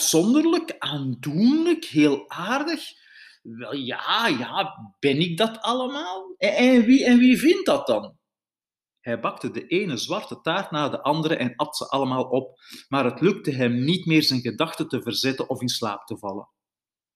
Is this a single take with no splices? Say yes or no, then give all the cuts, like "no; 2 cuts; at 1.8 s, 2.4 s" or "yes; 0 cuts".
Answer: yes; 0 cuts